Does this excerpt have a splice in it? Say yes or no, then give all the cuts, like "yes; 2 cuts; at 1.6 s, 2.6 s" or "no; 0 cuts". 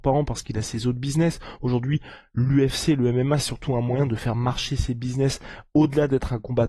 no; 0 cuts